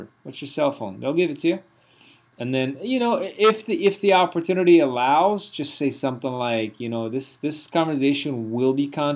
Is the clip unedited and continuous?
no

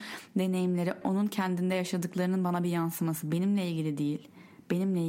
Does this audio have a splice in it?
yes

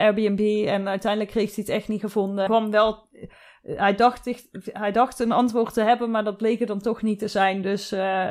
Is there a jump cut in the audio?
yes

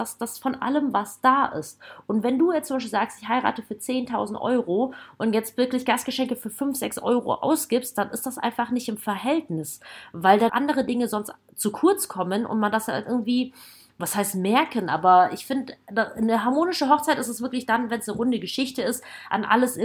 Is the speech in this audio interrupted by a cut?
yes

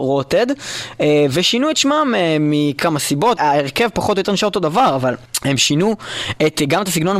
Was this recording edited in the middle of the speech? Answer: yes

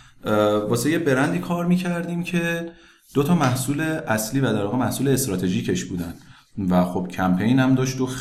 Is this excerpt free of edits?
yes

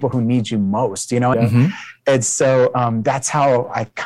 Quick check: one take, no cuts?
no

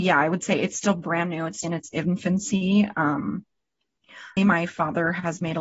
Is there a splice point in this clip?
yes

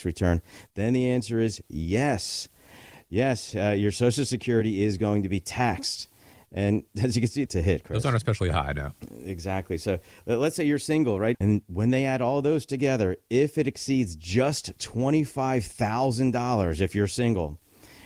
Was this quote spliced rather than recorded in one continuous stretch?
yes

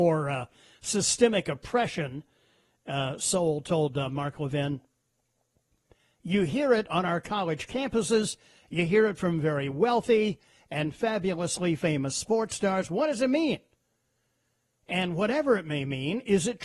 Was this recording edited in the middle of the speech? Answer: no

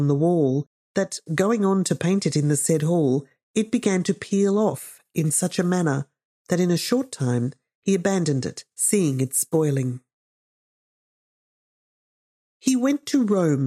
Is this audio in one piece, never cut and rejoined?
yes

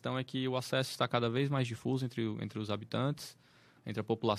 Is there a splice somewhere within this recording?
no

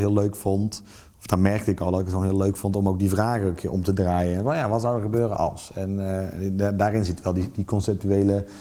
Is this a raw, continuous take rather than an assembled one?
yes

